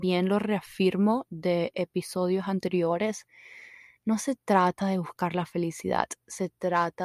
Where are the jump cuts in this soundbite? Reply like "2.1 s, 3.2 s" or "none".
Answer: none